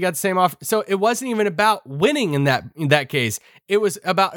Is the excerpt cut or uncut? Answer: uncut